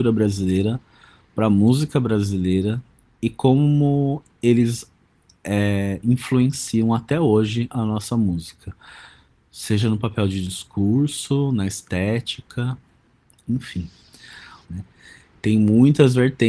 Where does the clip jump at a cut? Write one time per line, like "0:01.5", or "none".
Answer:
0:14.6